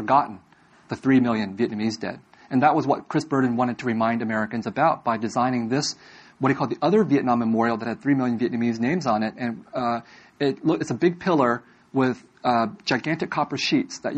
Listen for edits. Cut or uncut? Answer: uncut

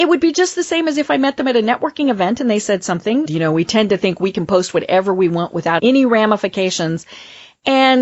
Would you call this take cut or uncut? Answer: cut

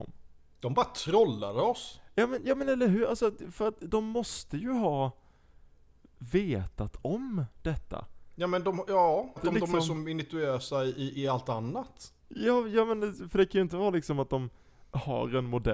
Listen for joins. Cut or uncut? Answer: cut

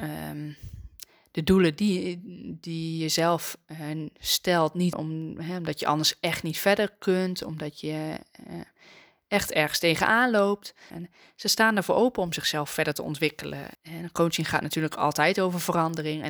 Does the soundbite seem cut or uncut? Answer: cut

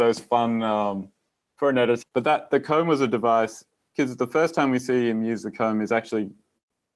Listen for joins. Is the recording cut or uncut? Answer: cut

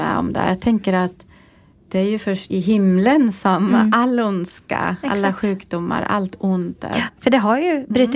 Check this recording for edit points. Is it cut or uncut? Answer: cut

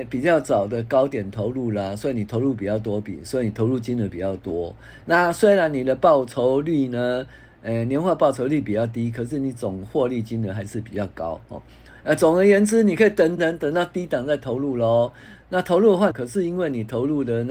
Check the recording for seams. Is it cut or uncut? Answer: cut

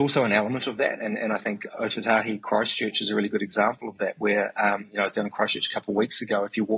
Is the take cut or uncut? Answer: uncut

